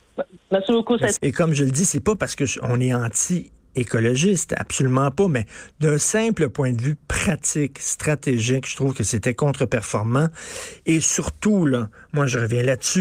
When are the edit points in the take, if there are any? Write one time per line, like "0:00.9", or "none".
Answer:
0:01.2